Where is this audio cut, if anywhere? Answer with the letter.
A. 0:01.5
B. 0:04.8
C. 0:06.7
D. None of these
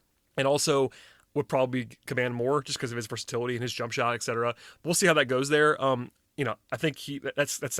C